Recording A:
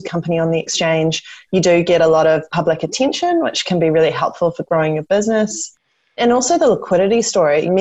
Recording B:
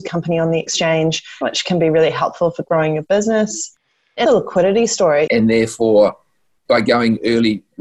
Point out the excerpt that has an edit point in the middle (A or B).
B